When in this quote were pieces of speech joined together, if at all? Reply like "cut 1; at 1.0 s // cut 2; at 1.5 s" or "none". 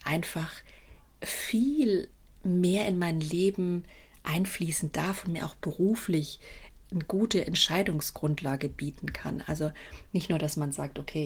none